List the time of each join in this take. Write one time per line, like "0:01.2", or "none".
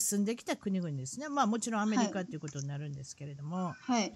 none

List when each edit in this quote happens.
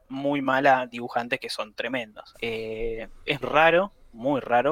0:02.3
0:03.4

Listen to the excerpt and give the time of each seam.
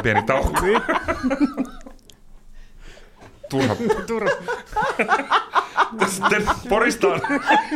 0:06.6

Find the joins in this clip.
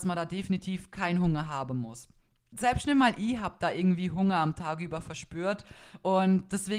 0:02.5

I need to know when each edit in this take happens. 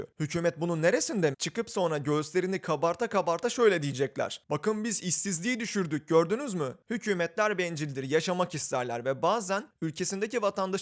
0:01.3
0:06.8

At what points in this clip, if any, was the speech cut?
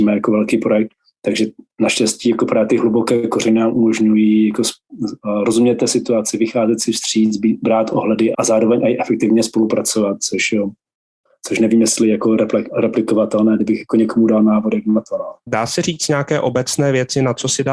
0:08.3
0:15.5

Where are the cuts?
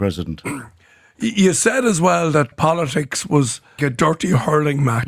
0:02.5
0:03.8

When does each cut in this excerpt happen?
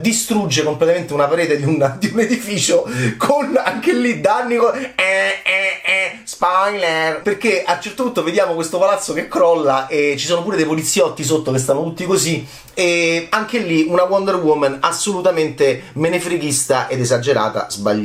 0:07.2

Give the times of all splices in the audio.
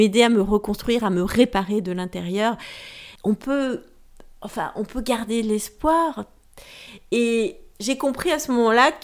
0:03.2

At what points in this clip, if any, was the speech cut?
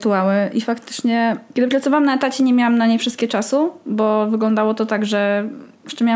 none

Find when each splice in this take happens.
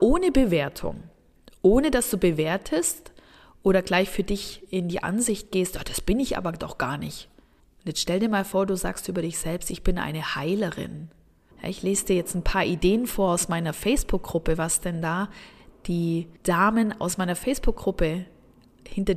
0:07.6
0:11.5
0:16.4

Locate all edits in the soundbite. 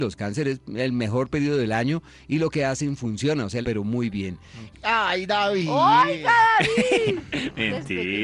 0:03.6
0:04.7

